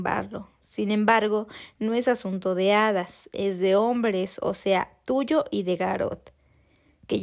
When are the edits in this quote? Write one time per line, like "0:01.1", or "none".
none